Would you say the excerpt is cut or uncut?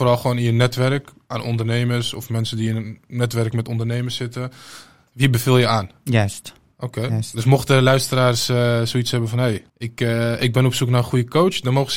cut